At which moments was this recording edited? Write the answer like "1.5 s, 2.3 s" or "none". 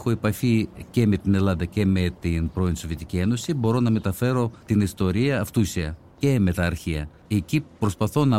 7.2 s